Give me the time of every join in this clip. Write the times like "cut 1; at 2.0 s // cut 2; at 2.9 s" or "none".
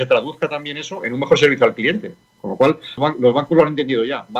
cut 1; at 3.0 s